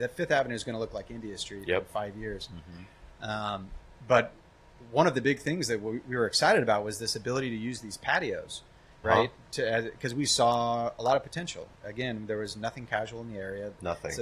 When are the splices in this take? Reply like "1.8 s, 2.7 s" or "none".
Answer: 9.0 s